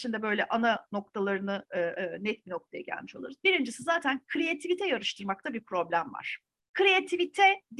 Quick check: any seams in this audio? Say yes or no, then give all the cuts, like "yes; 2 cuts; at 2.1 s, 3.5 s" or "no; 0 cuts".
yes; 1 cut; at 2.0 s